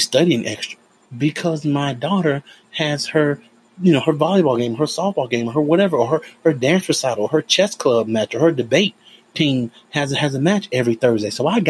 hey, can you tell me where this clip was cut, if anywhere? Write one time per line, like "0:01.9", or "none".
0:01.1